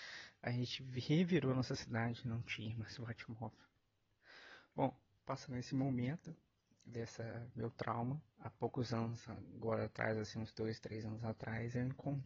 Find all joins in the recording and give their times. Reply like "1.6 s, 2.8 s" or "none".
8.3 s